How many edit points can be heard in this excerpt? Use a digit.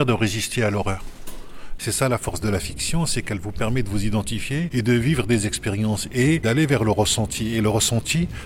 1